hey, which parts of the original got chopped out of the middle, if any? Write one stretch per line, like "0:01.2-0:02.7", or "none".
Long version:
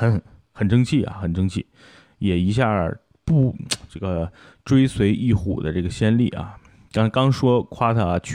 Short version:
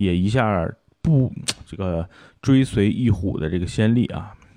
none